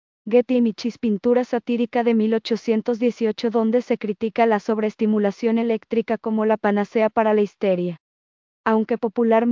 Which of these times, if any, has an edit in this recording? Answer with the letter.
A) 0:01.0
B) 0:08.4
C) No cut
B